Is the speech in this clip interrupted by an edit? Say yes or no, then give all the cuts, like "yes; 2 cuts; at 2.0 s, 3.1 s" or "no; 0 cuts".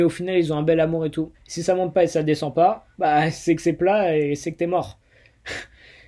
yes; 2 cuts; at 1.3 s, 2.9 s